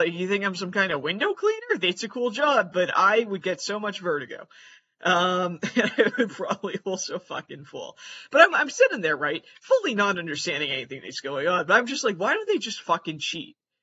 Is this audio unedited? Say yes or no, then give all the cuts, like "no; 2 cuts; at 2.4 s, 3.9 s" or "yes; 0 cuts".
yes; 0 cuts